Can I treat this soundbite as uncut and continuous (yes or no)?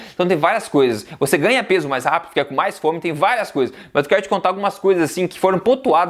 yes